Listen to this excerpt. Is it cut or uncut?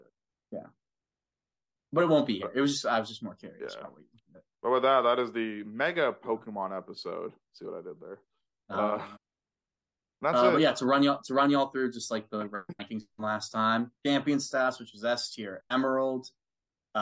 cut